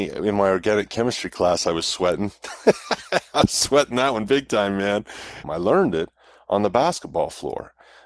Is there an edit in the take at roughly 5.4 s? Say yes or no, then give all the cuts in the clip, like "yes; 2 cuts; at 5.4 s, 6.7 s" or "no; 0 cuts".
yes; 1 cut; at 5.4 s